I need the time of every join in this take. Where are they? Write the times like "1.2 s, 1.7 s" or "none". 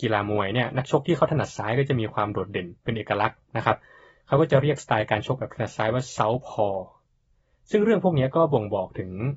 none